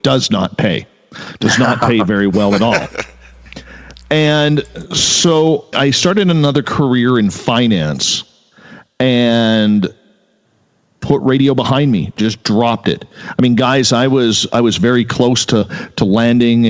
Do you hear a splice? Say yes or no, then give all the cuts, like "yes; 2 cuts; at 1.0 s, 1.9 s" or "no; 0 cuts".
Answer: yes; 1 cut; at 5.7 s